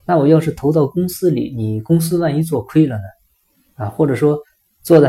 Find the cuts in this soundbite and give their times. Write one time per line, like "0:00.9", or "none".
none